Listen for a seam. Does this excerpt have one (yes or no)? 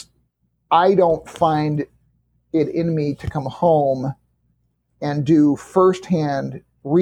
no